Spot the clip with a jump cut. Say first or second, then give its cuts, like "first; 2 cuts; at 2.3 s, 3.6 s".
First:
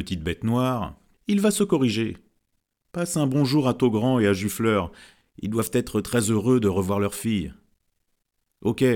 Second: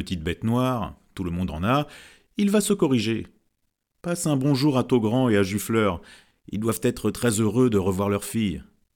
first; 1 cut; at 1.1 s